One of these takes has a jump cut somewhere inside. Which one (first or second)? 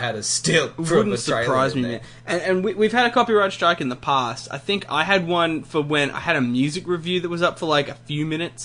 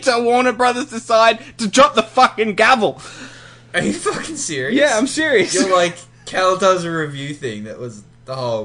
first